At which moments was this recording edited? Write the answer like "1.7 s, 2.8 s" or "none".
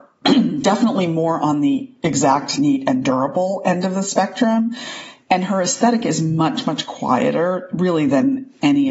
none